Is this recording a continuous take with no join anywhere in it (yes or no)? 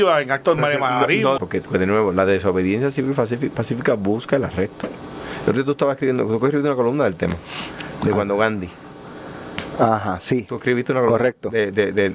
no